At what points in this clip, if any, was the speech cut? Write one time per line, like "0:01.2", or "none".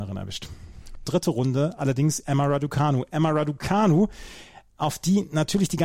0:01.1